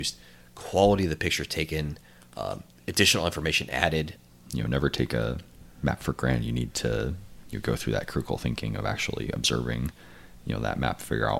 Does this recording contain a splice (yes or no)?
yes